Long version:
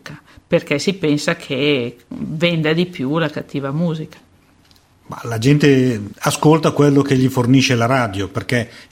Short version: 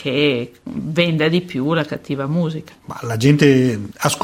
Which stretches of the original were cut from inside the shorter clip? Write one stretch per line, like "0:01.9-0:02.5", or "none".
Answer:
0:04.2-0:05.0